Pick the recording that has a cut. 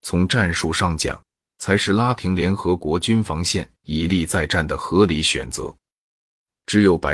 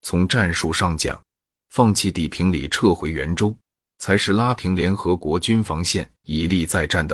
first; 1 cut; at 1.4 s

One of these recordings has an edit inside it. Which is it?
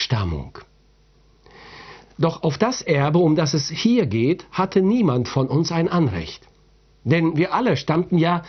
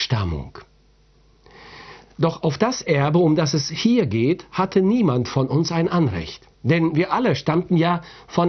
second; 1 cut; at 6.5 s

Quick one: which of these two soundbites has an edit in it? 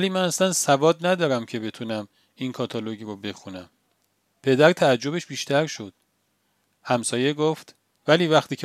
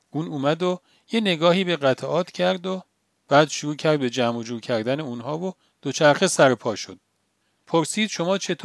second; 1 cut; at 7.5 s

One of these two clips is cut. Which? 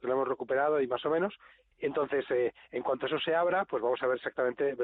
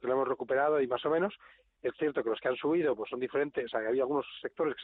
first; 1 cut; at 1.7 s

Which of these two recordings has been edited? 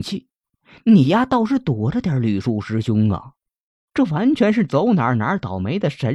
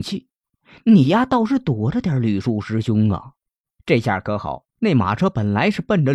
second; 2 cuts; at 3.6 s, 4.7 s

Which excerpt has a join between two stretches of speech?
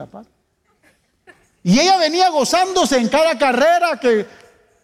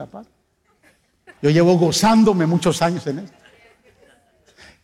second; 1 cut; at 1.4 s

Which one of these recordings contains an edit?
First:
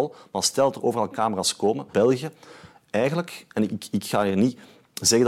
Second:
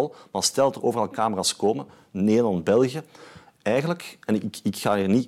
first; 1 cut; at 1.9 s

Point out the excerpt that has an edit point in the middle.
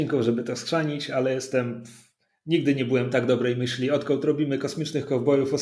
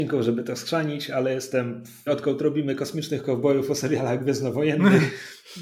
second; 1 cut; at 2.1 s

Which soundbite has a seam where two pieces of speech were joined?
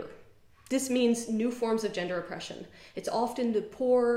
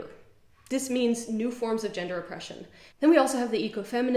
second; 1 cut; at 2.9 s

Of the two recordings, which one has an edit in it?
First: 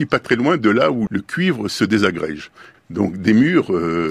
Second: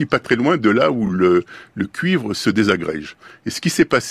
first; 2 cuts; at 1.1 s, 2.7 s

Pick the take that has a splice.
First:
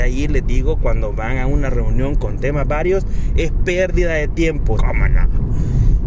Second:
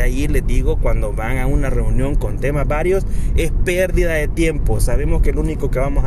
first; 1 cut; at 4.8 s

